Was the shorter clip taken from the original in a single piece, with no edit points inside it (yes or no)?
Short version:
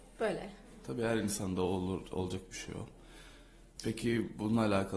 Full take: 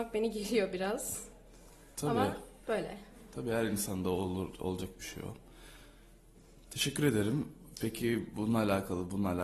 no